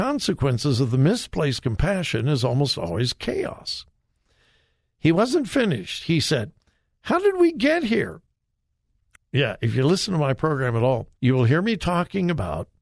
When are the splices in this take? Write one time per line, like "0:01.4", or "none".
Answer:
0:09.1
0:11.1